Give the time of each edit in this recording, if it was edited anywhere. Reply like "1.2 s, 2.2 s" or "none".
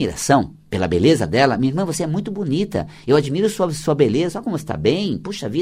none